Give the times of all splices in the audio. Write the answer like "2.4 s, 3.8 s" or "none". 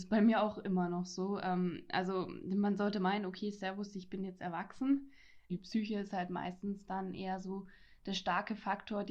5.5 s